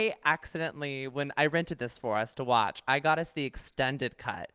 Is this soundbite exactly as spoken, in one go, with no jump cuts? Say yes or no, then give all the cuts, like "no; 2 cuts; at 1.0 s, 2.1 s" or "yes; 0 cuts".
yes; 0 cuts